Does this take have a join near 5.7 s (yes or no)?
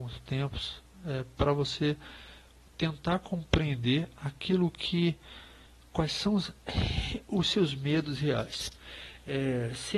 no